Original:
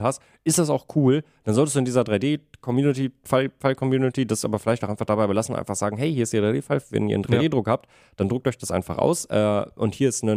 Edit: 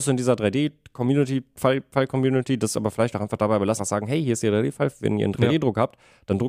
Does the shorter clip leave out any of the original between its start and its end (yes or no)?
yes